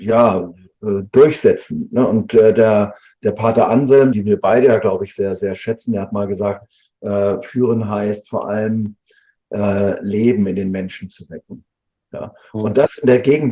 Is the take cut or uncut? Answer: cut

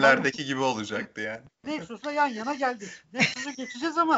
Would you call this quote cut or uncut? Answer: cut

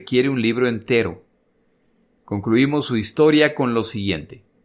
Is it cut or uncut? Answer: uncut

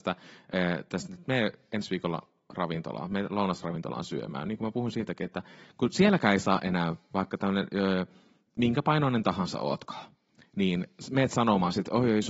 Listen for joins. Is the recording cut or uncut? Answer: uncut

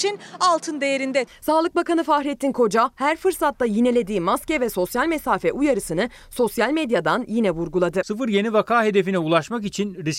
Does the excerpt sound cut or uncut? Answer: cut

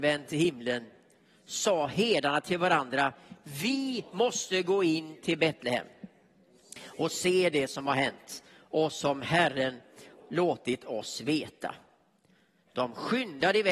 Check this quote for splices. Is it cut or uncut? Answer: uncut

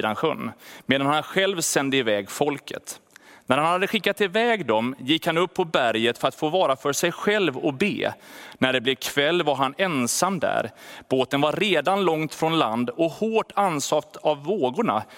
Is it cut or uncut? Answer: uncut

